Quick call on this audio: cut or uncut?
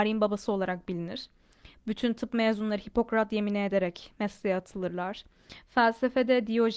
cut